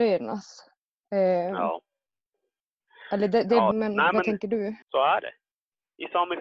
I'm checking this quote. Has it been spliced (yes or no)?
yes